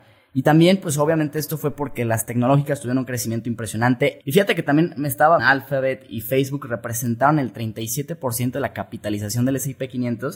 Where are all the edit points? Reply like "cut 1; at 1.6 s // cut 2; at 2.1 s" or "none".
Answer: cut 1; at 4.2 s // cut 2; at 5.4 s